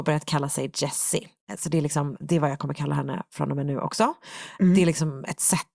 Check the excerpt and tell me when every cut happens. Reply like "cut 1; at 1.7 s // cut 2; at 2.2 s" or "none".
cut 1; at 2.2 s